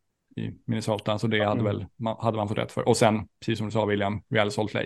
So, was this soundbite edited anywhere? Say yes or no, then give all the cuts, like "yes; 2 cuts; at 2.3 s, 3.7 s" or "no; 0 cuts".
no; 0 cuts